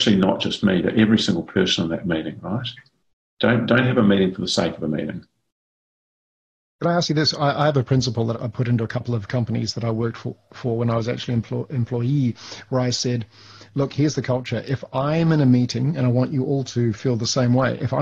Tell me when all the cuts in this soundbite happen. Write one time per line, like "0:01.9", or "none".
0:08.3